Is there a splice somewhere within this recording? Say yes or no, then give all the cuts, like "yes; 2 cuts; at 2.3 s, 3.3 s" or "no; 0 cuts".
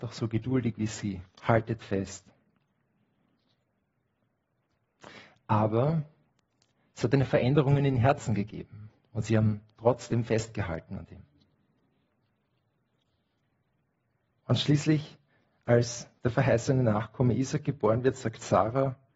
yes; 1 cut; at 1.3 s